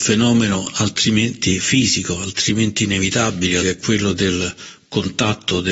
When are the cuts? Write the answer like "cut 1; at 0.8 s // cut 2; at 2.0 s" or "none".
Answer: cut 1; at 3.6 s